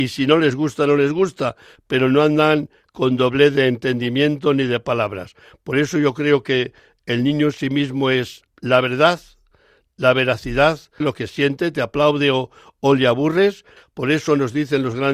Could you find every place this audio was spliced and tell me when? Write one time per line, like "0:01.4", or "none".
0:11.0
0:13.8